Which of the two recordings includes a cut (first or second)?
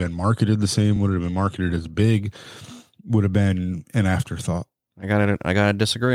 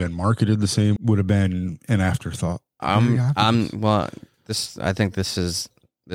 second